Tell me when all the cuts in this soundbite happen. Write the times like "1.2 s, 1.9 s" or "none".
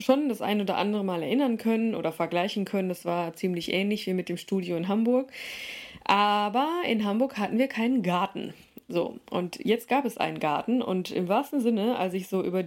none